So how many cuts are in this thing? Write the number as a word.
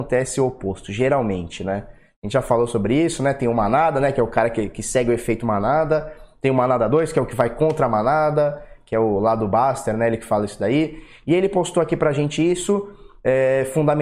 zero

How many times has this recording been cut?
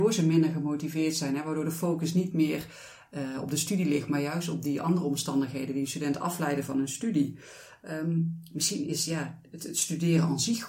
zero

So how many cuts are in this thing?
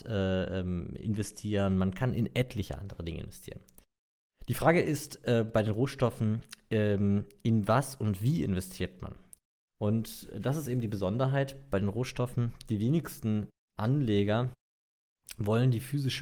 zero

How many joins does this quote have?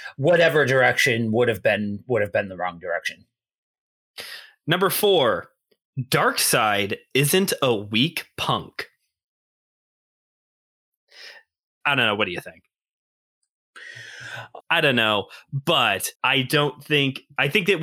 three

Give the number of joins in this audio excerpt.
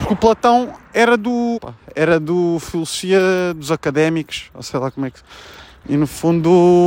two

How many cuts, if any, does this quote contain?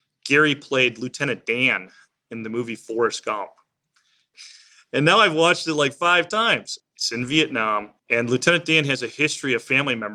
three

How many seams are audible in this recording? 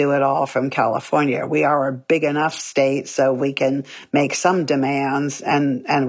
zero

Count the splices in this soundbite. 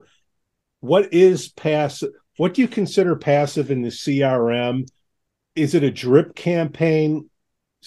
zero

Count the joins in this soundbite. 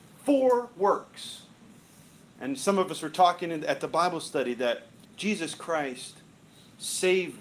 one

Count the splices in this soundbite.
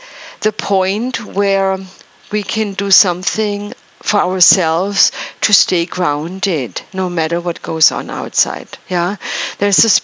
one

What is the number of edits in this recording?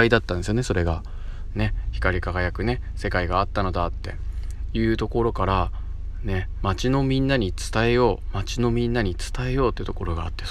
one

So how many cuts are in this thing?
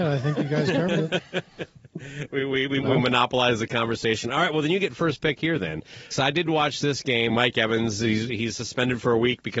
two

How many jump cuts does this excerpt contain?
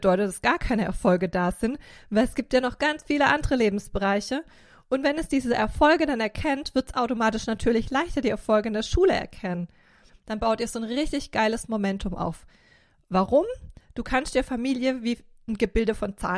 two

